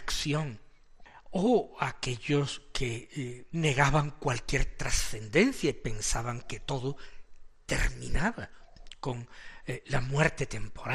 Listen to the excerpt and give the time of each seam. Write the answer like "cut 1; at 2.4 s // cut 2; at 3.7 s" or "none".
none